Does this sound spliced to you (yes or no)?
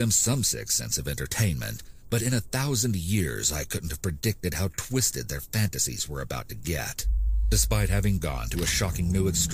yes